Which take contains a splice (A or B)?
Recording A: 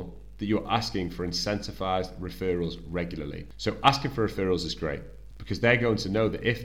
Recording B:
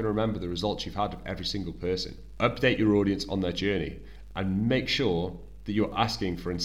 A